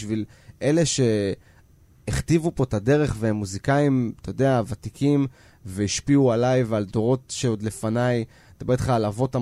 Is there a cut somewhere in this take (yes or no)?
no